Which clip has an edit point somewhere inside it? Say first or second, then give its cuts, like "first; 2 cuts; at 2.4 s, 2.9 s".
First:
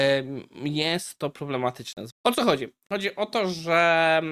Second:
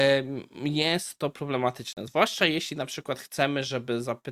first; 1 cut; at 2.1 s